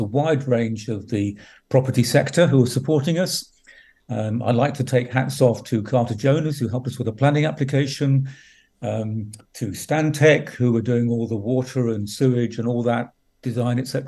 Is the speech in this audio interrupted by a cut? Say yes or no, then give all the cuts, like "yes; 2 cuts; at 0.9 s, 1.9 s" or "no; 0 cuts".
no; 0 cuts